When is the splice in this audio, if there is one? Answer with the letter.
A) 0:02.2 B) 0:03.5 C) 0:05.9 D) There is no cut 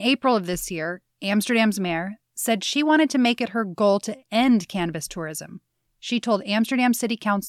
A